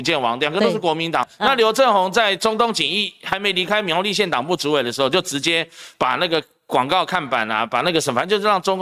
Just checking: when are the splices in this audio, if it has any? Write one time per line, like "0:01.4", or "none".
0:01.2